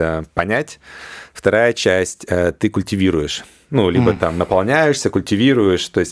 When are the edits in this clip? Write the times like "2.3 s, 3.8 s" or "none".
none